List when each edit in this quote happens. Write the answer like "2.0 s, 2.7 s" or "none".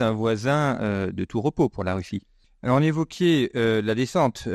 2.4 s